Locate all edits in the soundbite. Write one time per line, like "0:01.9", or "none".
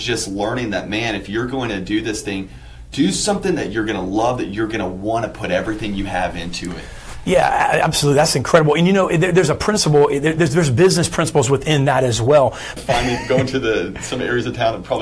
0:12.8